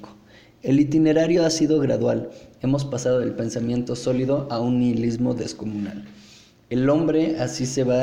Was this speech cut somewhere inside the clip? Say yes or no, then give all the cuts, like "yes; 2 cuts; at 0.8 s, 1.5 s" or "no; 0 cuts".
no; 0 cuts